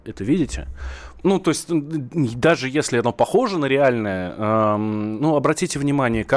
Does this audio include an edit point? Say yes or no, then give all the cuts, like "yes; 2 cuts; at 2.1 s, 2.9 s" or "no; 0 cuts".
yes; 1 cut; at 1.2 s